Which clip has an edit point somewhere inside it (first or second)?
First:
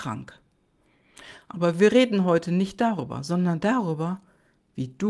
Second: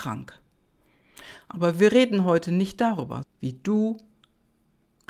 second